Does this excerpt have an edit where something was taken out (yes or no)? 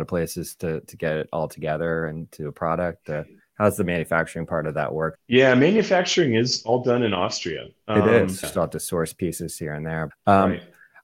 yes